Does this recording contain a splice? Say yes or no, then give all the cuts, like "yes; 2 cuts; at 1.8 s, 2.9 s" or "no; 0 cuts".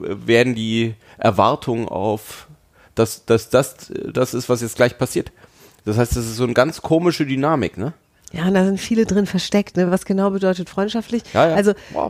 no; 0 cuts